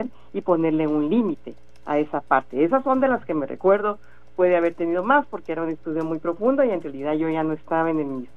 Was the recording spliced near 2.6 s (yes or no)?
no